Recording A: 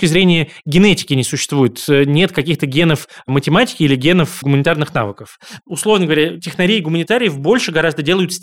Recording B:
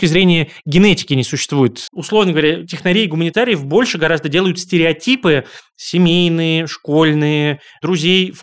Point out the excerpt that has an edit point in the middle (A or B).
B